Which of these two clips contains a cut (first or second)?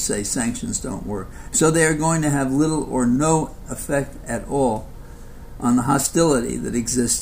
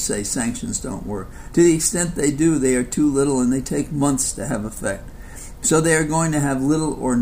first